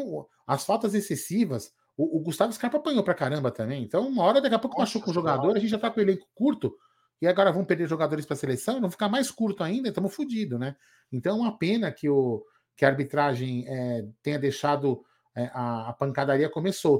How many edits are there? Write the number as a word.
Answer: zero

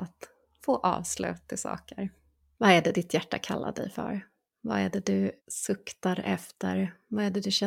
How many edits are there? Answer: two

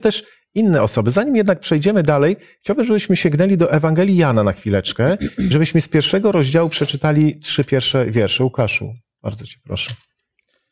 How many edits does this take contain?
zero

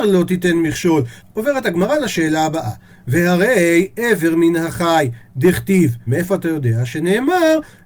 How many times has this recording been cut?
two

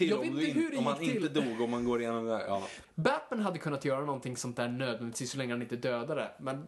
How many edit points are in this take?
one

